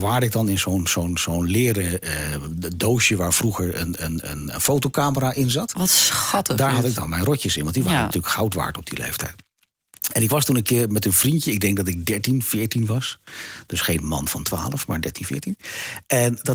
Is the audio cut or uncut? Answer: uncut